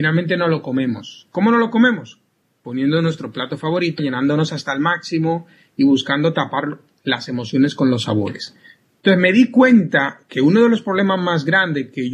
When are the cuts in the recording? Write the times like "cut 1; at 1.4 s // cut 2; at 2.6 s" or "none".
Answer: cut 1; at 4.0 s